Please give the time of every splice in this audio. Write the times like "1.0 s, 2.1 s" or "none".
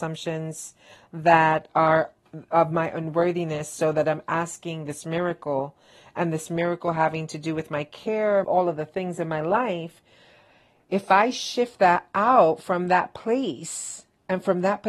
8.4 s

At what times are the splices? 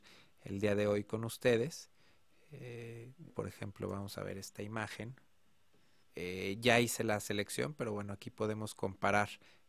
3.3 s, 6.0 s

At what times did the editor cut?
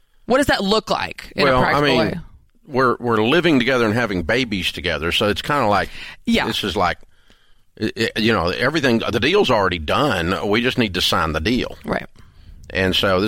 none

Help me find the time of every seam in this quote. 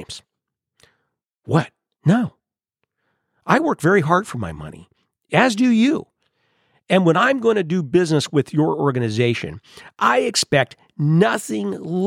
1.9 s

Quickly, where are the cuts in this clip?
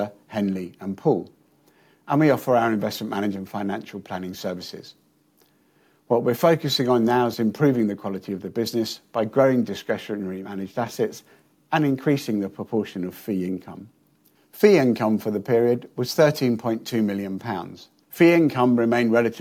18.0 s

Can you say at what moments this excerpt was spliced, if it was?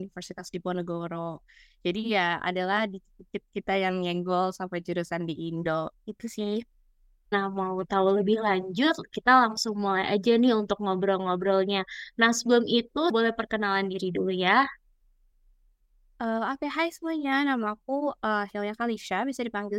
7.3 s

